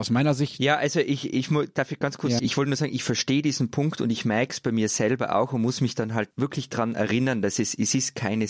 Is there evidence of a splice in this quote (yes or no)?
yes